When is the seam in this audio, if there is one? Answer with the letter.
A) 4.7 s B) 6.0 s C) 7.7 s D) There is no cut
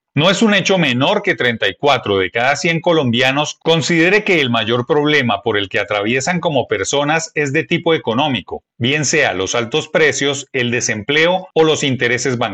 D